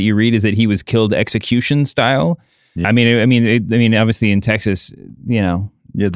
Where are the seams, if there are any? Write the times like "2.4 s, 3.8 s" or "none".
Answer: 2.8 s, 5.2 s